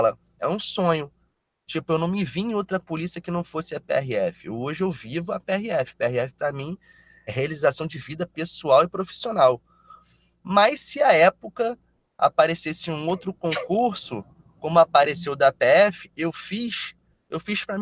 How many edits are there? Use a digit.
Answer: 1